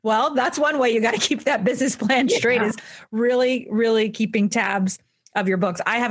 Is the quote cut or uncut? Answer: uncut